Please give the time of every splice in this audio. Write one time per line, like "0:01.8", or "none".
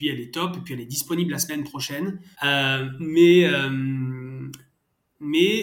0:02.3